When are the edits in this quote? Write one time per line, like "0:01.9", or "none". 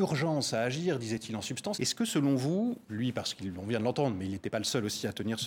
0:01.7
0:02.9